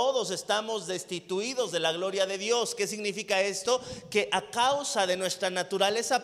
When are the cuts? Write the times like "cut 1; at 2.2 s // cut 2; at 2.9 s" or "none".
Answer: none